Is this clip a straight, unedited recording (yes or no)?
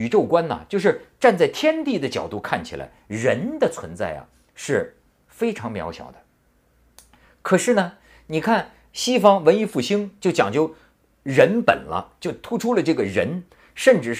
yes